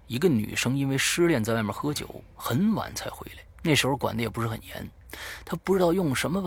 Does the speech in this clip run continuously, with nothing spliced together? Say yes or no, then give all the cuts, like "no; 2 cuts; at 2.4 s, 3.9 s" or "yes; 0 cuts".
no; 1 cut; at 3.5 s